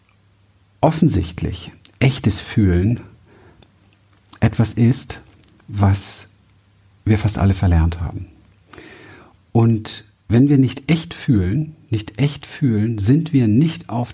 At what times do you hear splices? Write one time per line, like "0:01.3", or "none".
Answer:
none